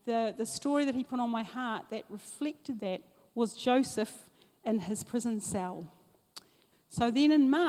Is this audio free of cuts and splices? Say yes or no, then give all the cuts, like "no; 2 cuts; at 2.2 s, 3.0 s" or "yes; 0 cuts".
no; 1 cut; at 6.7 s